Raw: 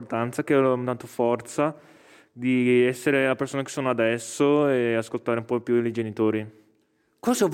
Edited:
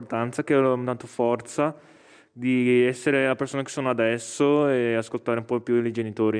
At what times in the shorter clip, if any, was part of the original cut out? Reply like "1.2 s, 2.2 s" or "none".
none